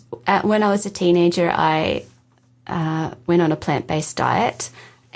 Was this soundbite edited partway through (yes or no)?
no